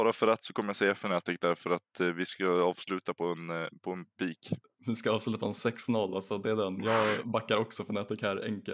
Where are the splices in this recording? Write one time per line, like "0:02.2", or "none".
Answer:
none